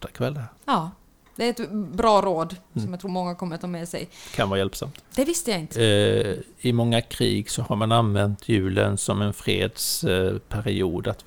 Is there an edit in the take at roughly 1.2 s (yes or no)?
no